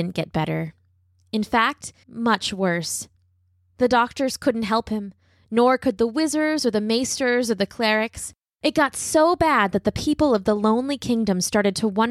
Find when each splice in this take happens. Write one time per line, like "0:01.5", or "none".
0:02.0